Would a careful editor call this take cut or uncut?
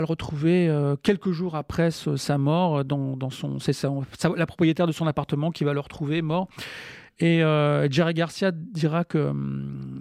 uncut